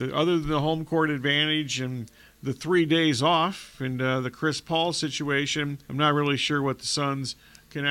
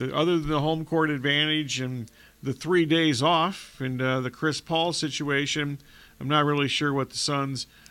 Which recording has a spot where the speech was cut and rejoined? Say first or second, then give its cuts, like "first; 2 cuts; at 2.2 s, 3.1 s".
first; 1 cut; at 5.8 s